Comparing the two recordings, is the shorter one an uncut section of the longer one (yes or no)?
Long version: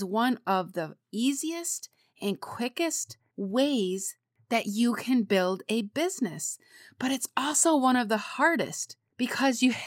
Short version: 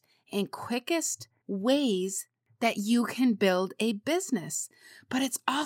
yes